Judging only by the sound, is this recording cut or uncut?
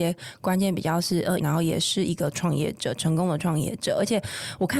cut